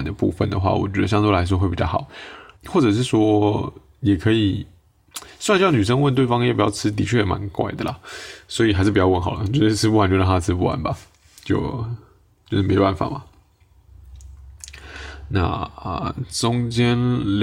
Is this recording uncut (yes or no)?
no